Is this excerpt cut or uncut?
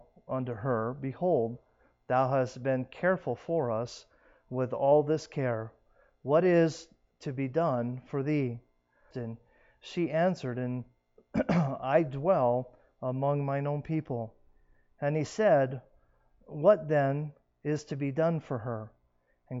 cut